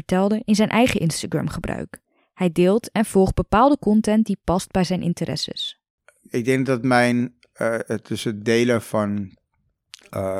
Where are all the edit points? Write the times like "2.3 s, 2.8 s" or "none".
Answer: none